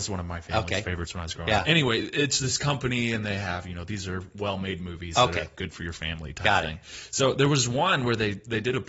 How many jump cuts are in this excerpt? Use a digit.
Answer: 0